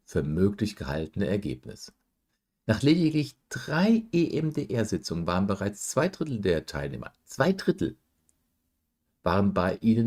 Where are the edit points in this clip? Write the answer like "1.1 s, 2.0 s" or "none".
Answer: none